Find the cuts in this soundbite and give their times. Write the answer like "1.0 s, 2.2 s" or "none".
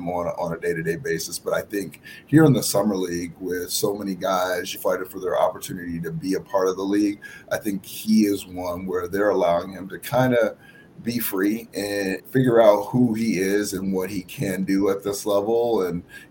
4.7 s, 12.2 s